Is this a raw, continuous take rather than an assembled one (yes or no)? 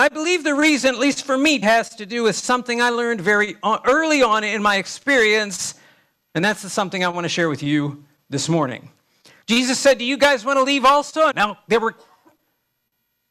no